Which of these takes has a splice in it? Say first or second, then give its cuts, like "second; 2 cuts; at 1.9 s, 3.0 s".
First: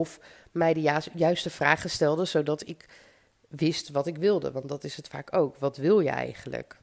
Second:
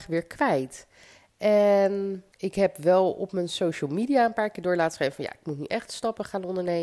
second; 1 cut; at 2.3 s